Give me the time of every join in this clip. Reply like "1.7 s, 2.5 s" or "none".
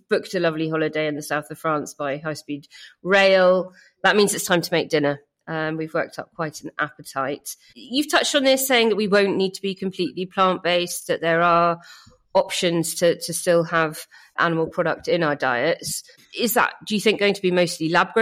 none

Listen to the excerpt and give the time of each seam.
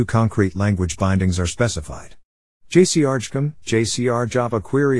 2.6 s

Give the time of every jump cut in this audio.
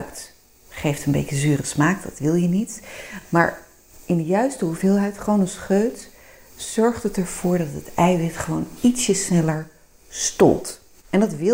none

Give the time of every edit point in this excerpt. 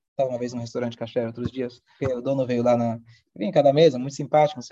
2.0 s

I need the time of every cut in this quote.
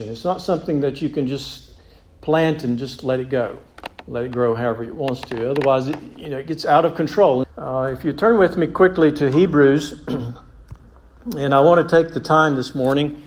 7.4 s

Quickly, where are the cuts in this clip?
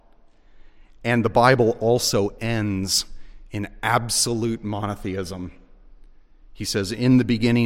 none

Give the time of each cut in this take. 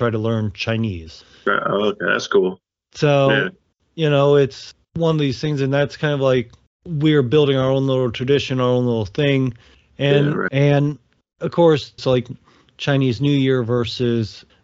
10.5 s, 12.0 s

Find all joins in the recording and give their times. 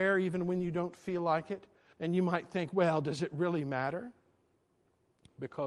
1.9 s

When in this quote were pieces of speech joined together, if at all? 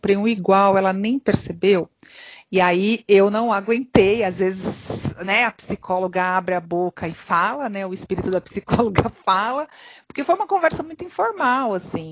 none

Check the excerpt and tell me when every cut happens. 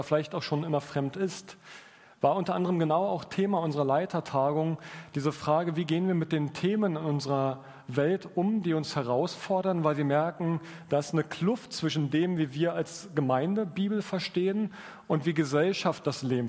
none

